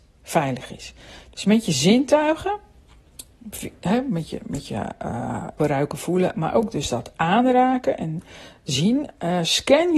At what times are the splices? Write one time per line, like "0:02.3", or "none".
0:05.6